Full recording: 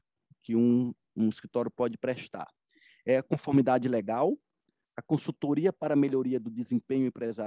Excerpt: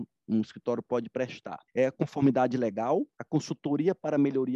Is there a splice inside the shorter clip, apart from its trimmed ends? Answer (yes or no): yes